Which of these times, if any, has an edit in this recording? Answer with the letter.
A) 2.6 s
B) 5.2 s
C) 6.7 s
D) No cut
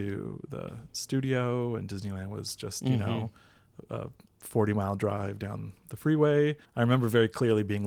C